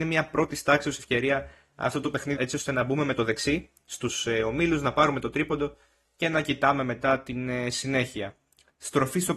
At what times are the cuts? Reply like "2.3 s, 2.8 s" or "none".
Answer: 2.4 s